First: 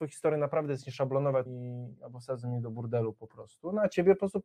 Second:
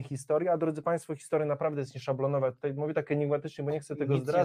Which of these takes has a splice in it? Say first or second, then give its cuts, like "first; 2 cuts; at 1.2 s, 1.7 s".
first; 1 cut; at 1.5 s